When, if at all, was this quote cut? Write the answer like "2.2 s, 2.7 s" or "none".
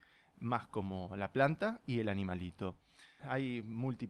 3.2 s